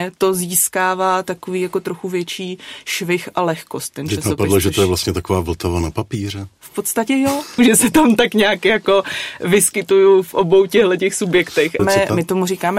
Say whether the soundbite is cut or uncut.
cut